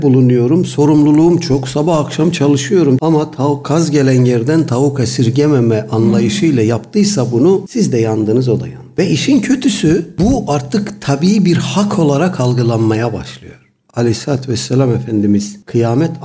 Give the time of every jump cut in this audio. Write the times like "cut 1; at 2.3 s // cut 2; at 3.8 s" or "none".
cut 1; at 3.0 s